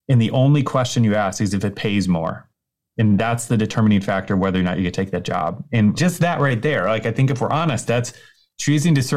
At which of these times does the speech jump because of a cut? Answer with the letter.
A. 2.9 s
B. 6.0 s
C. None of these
B